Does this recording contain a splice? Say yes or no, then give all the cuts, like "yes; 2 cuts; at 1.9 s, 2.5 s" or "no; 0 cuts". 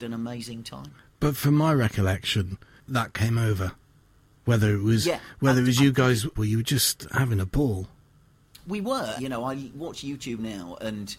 yes; 2 cuts; at 6.4 s, 9.2 s